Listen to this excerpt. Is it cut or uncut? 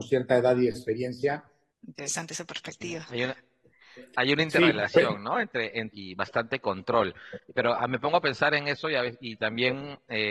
cut